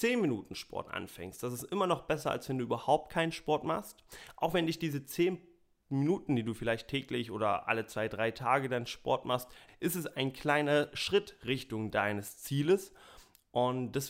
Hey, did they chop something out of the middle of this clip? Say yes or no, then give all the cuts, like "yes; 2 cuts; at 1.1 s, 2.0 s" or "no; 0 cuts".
yes; 1 cut; at 9.7 s